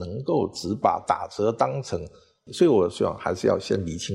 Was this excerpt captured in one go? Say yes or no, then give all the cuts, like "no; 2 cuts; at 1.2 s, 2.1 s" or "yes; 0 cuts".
no; 1 cut; at 2.5 s